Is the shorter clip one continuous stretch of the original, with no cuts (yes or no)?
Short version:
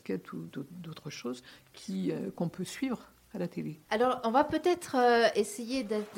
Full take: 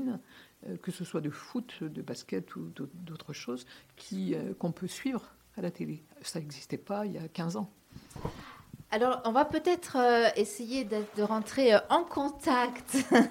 no